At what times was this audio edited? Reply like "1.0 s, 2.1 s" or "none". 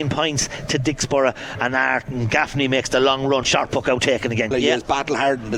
3.4 s, 4.5 s